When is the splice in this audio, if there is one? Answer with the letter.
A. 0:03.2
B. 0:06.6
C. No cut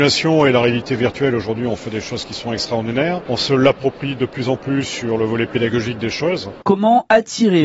B